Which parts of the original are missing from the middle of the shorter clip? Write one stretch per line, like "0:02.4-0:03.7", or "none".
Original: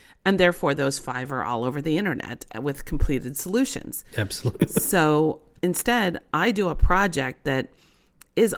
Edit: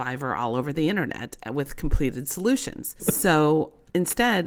0:04.1-0:04.7